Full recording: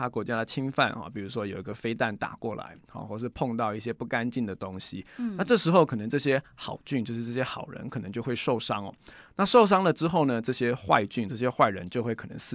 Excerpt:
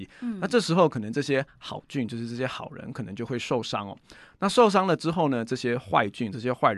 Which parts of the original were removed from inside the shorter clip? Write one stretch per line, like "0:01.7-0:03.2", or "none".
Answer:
none